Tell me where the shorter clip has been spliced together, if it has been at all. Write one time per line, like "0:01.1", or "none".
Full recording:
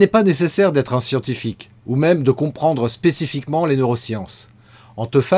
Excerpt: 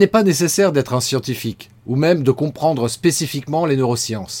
none